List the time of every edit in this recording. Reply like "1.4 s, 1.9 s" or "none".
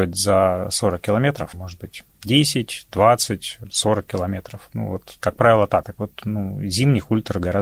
5.8 s

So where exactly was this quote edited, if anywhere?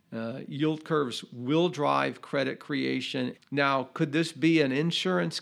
3.3 s

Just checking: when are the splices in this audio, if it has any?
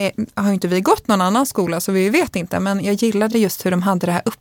none

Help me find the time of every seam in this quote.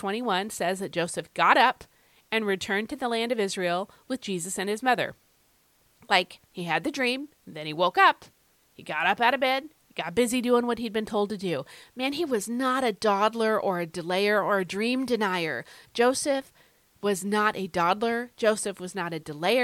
7.3 s

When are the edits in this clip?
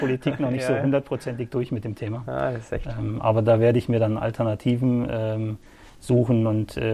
none

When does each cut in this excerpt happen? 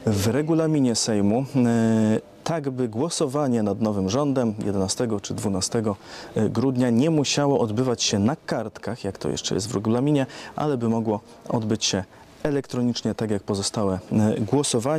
none

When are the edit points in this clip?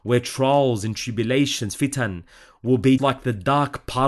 3.0 s

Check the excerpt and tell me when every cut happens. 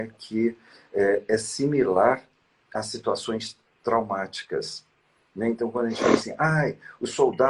none

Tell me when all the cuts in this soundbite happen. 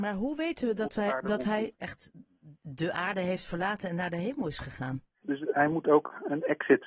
1.7 s, 5.2 s

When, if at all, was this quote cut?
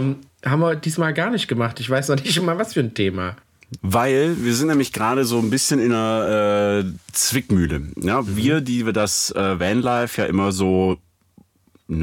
3.8 s

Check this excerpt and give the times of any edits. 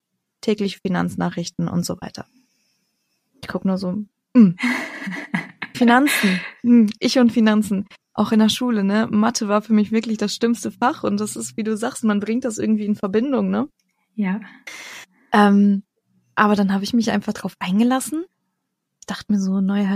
none

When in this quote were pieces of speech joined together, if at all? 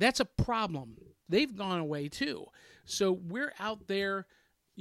1.3 s

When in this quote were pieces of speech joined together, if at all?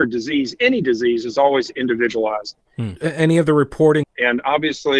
3.0 s, 4.0 s

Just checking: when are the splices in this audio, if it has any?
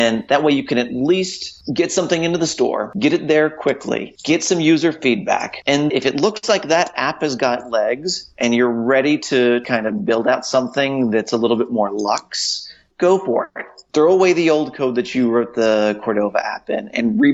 5.9 s, 12.9 s

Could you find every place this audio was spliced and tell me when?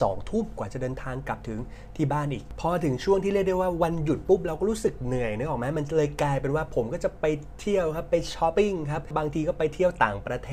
8.5 s

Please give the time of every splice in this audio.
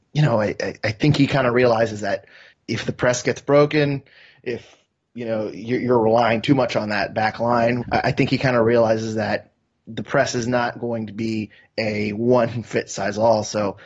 2.5 s, 7.8 s

